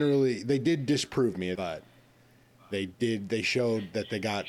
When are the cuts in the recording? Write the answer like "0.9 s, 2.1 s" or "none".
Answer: 1.5 s